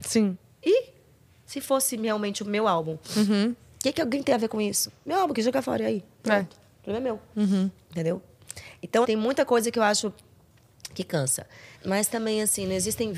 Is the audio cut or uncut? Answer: cut